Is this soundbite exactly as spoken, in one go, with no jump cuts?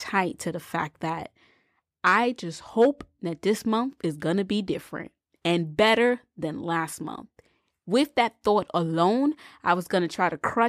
yes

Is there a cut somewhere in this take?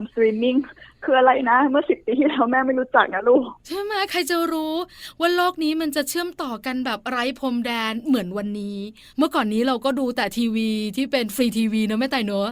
no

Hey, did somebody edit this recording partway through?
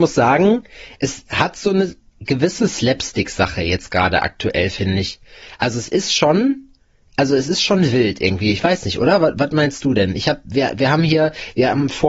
no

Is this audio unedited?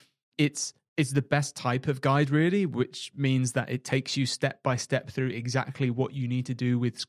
yes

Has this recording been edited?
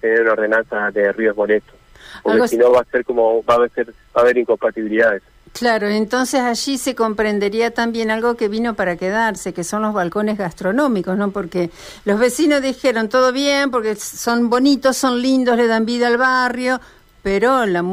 no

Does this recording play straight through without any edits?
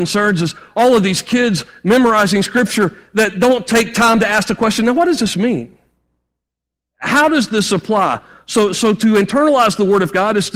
yes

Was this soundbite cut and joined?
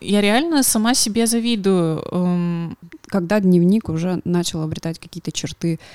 yes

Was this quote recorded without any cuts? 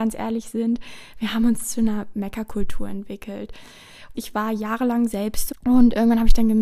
no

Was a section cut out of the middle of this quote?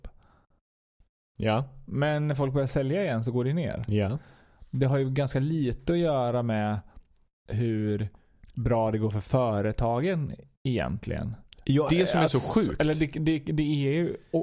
yes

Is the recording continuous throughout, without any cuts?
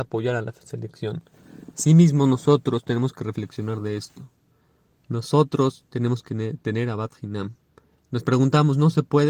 yes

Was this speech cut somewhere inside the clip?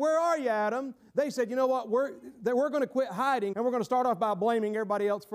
yes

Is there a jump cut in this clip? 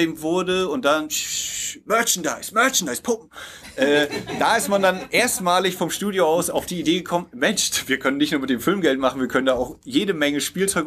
no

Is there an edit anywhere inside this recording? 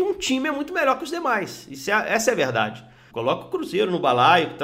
yes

